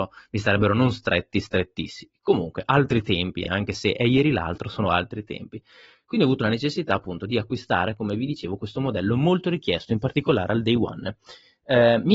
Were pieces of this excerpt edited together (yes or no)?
no